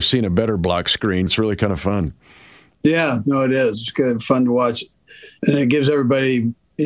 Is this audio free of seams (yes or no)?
no